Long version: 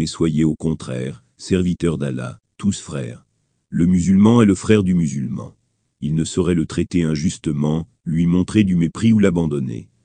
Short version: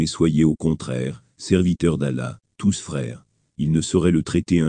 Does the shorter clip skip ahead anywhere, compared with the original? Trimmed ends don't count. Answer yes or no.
yes